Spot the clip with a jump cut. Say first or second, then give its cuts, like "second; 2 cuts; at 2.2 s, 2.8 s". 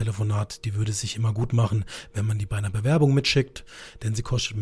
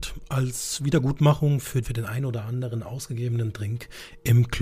second; 1 cut; at 1.8 s